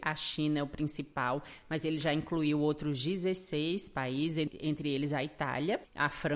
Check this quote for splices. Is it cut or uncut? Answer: uncut